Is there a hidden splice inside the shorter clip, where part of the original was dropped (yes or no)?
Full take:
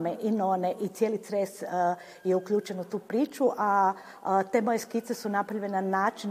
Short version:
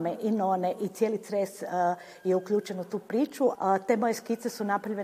yes